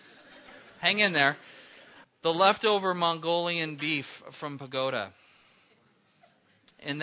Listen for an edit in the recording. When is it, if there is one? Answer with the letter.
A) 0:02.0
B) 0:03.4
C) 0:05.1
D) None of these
A